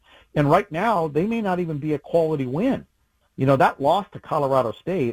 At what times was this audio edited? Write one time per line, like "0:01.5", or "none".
none

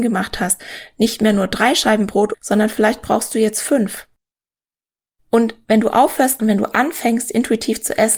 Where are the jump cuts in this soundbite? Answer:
0:02.3
0:06.4

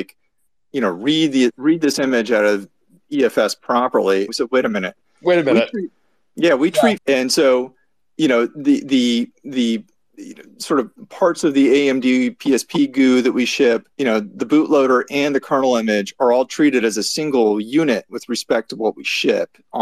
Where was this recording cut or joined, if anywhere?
0:04.3
0:07.0
0:13.9

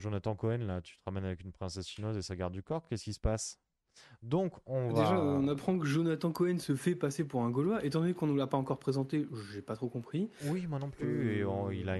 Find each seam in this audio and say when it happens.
none

